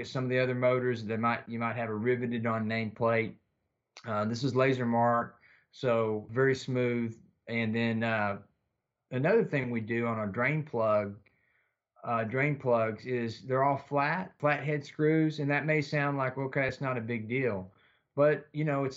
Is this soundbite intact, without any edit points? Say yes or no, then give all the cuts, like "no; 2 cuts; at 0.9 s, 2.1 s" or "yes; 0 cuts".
yes; 0 cuts